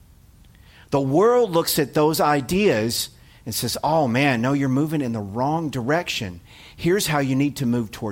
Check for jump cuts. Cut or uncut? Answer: uncut